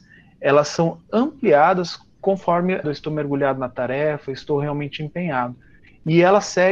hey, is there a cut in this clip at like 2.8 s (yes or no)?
yes